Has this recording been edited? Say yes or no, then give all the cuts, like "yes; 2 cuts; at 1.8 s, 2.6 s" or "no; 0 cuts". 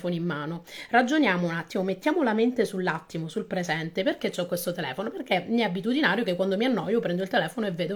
no; 0 cuts